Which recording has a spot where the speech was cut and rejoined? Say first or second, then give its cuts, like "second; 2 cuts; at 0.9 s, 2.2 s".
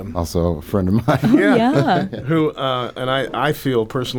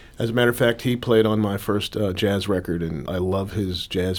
second; 1 cut; at 3.1 s